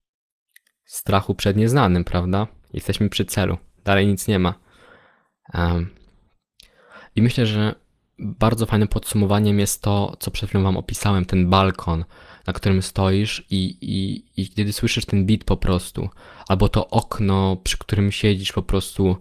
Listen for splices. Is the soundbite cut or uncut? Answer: cut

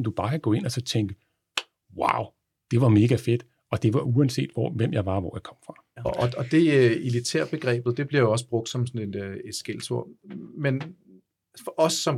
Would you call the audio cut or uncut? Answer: cut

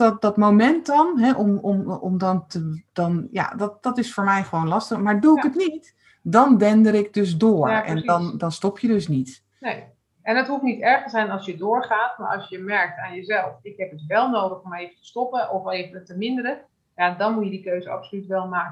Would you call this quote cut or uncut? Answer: cut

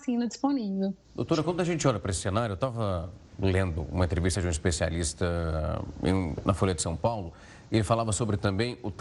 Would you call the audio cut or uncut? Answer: cut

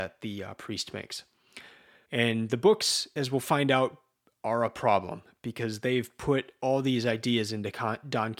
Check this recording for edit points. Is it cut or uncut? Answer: cut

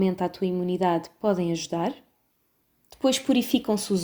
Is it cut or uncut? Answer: uncut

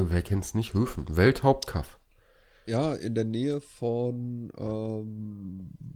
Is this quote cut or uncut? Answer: uncut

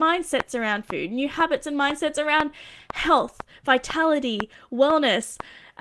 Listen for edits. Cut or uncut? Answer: uncut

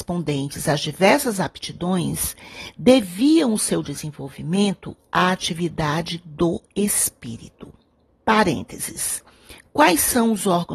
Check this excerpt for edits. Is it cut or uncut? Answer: uncut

